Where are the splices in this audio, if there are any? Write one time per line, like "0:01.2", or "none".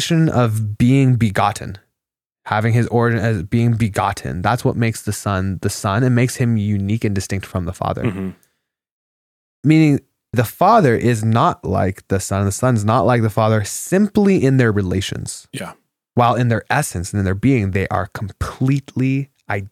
0:10.3